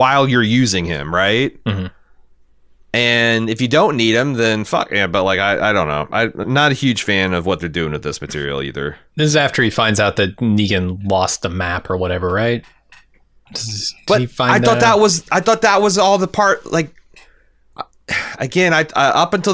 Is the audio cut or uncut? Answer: cut